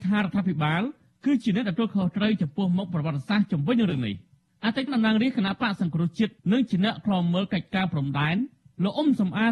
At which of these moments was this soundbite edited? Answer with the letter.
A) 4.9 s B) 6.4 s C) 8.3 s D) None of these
A